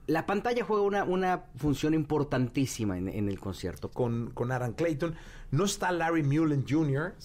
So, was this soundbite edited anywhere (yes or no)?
yes